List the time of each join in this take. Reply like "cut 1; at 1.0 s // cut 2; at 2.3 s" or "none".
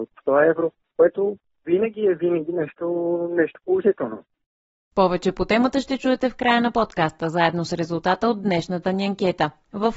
none